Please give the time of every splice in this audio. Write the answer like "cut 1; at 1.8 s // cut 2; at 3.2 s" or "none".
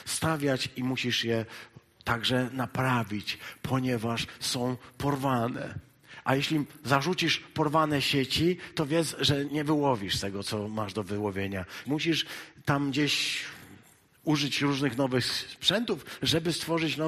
cut 1; at 9.5 s // cut 2; at 11.8 s

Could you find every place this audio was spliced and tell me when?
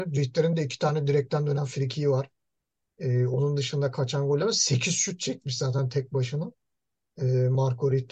none

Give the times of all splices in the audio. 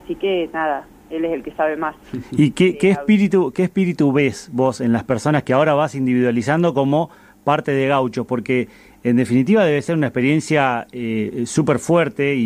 none

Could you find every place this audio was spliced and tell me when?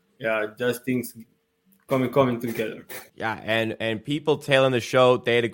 cut 1; at 3.1 s

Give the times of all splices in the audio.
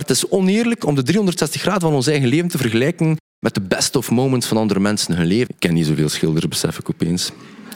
cut 1; at 5.5 s

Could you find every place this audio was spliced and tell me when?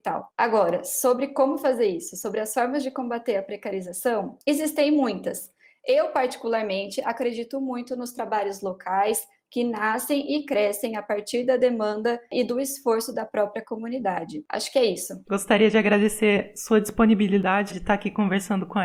cut 1; at 15.2 s // cut 2; at 17.7 s

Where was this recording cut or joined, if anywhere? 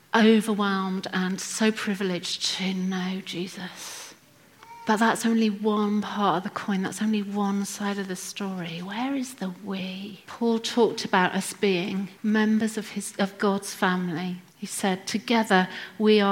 cut 1; at 10.2 s // cut 2; at 14.5 s

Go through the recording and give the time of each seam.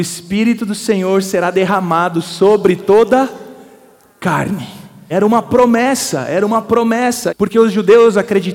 cut 1; at 5.1 s // cut 2; at 7.3 s

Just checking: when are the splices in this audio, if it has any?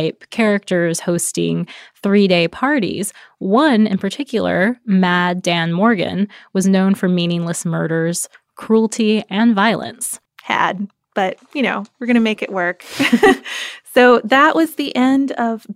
cut 1; at 10.3 s

